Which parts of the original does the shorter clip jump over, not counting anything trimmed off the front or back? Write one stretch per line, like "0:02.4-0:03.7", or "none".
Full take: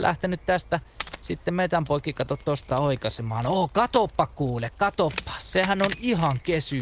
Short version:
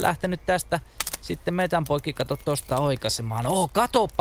none